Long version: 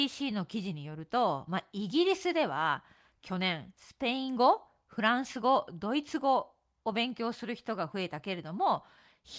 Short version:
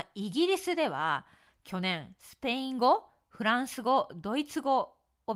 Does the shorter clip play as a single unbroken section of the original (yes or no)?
yes